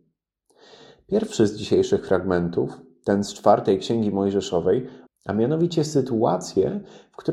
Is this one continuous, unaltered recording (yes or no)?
no